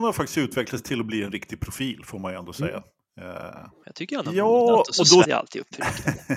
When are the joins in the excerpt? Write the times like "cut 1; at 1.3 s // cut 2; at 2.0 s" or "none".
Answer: cut 1; at 3.8 s // cut 2; at 5.2 s